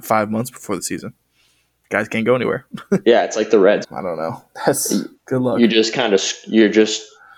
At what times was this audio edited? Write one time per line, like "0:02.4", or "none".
0:03.8